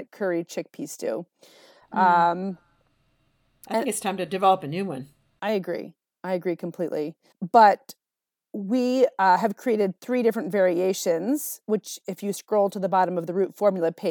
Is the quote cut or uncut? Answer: cut